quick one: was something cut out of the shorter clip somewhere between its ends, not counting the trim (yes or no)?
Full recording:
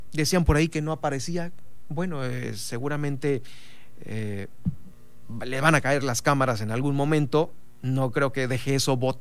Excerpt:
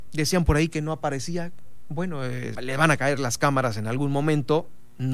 yes